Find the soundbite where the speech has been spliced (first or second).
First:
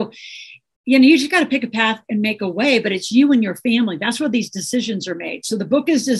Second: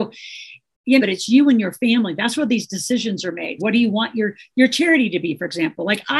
second